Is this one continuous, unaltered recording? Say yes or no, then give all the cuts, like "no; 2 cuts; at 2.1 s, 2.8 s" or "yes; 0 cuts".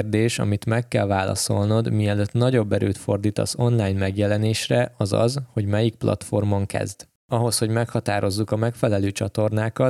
yes; 0 cuts